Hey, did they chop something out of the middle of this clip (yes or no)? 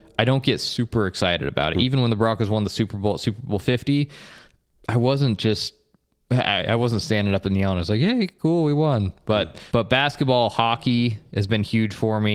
yes